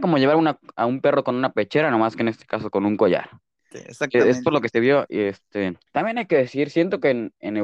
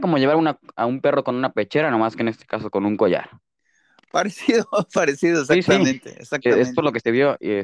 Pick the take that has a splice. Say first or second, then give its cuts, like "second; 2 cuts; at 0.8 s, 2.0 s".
first; 2 cuts; at 3.7 s, 5.9 s